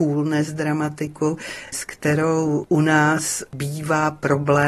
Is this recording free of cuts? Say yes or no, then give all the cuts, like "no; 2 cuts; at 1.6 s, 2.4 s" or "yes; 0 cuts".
yes; 0 cuts